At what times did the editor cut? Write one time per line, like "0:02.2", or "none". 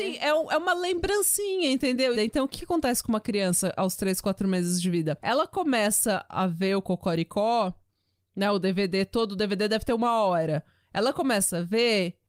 0:02.1
0:06.3